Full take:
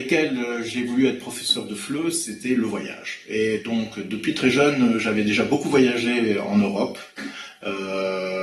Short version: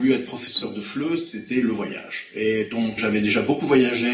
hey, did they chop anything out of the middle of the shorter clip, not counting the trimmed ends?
yes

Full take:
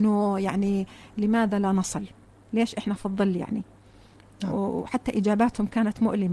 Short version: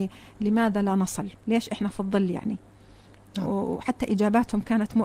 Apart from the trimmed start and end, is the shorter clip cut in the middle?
yes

